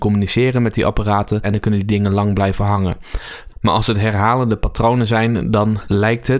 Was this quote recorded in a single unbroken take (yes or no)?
no